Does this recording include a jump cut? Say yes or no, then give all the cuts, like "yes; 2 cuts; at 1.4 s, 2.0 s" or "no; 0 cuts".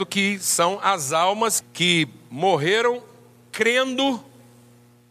yes; 1 cut; at 1.6 s